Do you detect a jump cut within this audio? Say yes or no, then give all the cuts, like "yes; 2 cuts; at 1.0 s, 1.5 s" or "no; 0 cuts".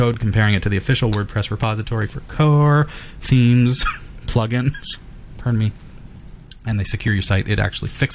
no; 0 cuts